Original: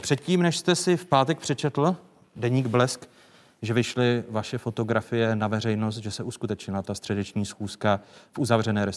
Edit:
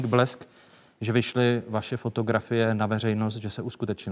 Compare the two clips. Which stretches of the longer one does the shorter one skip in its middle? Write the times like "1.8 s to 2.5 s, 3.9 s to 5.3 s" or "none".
none